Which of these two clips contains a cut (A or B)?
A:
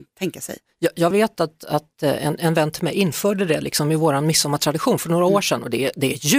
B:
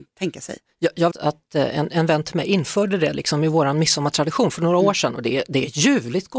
B